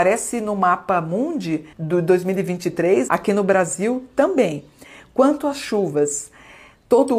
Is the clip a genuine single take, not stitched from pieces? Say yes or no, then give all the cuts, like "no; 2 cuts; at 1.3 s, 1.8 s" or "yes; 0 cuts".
no; 2 cuts; at 1.7 s, 3.1 s